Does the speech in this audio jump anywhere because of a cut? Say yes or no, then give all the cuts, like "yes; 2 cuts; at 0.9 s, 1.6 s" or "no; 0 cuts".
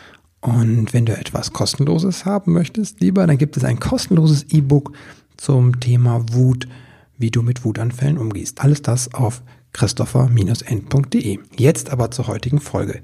yes; 2 cuts; at 8.5 s, 11.5 s